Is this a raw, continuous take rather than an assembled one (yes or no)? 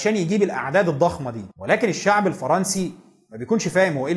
no